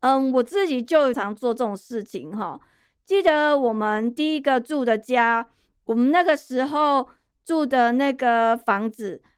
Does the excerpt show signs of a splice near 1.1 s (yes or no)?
yes